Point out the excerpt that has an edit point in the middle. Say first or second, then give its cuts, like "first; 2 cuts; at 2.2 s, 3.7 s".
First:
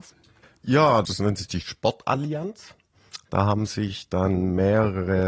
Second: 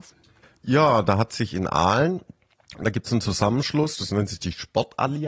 first; 1 cut; at 1.0 s